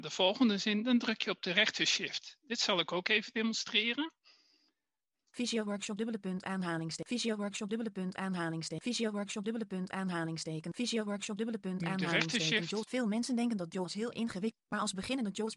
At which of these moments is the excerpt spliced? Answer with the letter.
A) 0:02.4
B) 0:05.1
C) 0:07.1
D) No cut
B